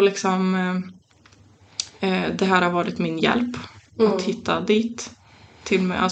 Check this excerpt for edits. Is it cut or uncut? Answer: uncut